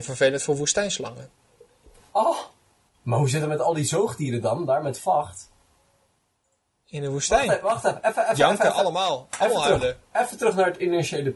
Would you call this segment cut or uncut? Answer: cut